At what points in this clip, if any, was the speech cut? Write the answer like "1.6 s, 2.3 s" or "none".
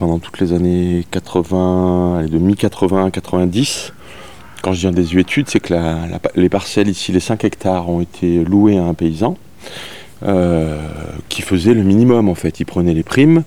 none